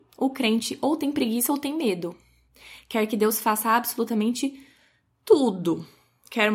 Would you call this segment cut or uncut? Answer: uncut